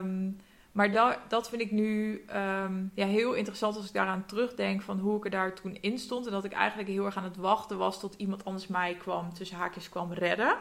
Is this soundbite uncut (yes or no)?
yes